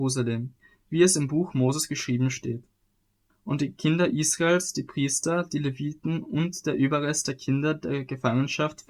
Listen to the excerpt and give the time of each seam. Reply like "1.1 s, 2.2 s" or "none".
3.3 s